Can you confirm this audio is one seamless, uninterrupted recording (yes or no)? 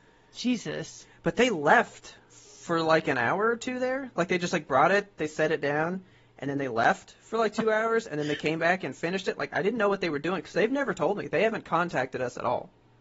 yes